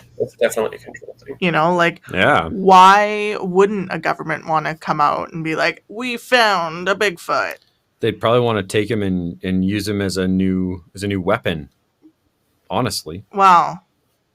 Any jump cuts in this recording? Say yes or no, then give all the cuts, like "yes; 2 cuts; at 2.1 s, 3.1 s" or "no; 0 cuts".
yes; 2 cuts; at 1.4 s, 13.3 s